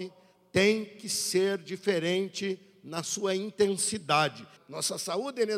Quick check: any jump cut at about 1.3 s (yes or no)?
no